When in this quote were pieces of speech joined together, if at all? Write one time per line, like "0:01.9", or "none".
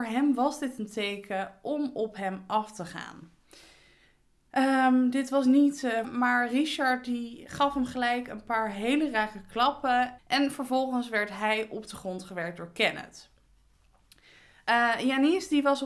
0:06.0
0:10.2